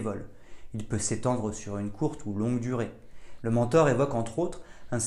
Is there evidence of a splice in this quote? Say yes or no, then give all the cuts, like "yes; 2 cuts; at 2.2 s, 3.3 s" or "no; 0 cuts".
yes; 1 cut; at 3.4 s